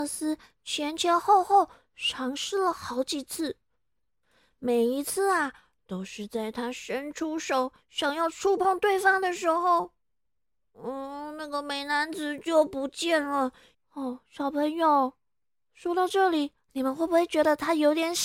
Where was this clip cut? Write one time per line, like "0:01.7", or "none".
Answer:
0:13.7